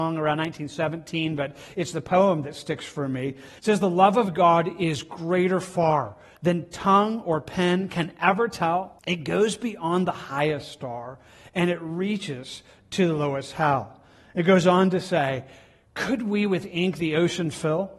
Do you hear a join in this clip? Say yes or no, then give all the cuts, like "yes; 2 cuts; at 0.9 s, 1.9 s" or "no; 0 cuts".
yes; 2 cuts; at 3.6 s, 9.0 s